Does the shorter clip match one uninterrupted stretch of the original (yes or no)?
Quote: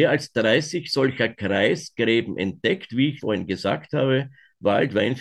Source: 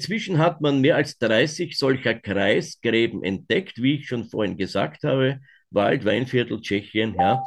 no